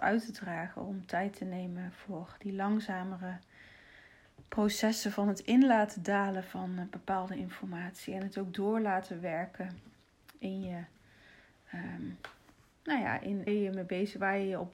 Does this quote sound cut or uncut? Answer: cut